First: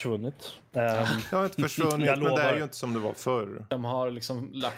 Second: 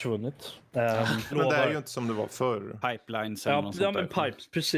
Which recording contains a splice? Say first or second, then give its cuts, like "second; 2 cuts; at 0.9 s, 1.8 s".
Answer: second; 2 cuts; at 1.3 s, 2.8 s